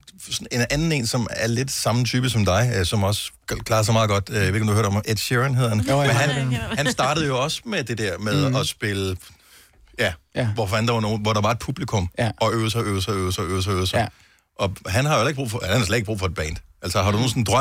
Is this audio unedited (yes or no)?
yes